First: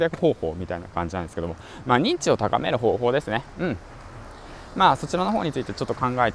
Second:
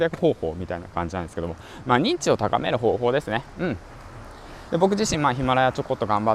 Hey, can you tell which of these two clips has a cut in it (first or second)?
second